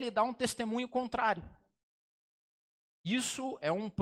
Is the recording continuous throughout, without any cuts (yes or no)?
yes